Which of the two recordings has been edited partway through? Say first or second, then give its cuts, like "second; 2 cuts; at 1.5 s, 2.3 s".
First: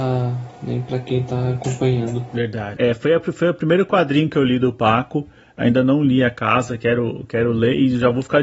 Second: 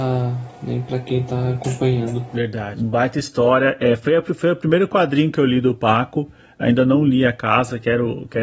first; 1 cut; at 2.8 s